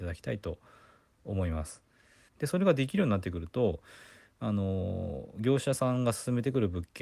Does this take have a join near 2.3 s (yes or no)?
yes